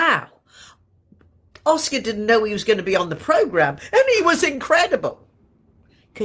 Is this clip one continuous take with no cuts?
yes; 0 cuts

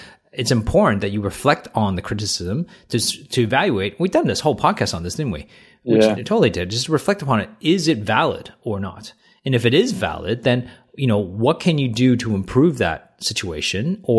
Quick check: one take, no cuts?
yes; 0 cuts

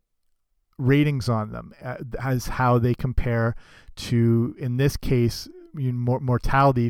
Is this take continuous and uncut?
yes; 0 cuts

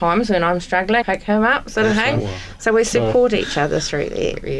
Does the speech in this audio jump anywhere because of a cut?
yes; 1 cut; at 1.0 s

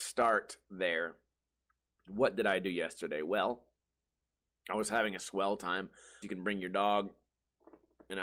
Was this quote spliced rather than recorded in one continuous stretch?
yes; 1 cut; at 6.2 s

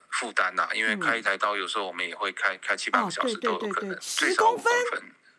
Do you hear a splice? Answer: yes; 1 cut; at 4.0 s

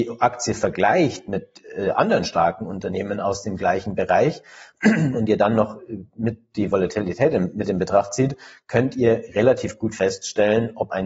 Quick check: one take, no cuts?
yes; 0 cuts

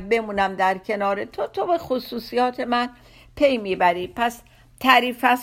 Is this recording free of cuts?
yes; 0 cuts

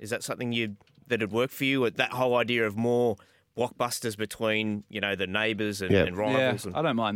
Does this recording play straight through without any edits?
yes; 0 cuts

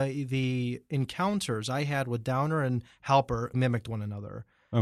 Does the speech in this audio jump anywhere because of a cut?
yes; 1 cut; at 3.5 s

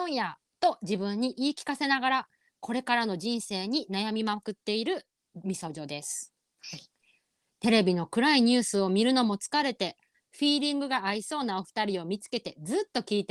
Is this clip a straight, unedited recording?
no; 1 cut; at 10.1 s

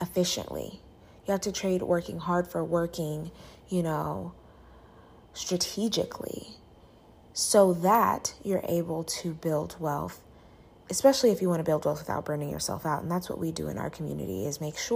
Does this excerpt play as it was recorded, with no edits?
yes; 0 cuts

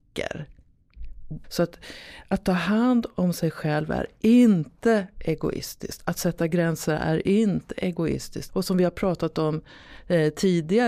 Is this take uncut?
no; 2 cuts; at 1.4 s, 8.5 s

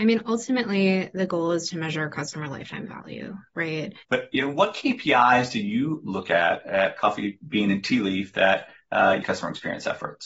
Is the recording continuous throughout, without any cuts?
no; 2 cuts; at 4.0 s, 9.2 s

